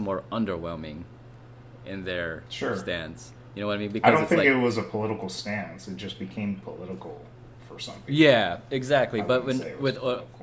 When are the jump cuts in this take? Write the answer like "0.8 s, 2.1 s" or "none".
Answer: none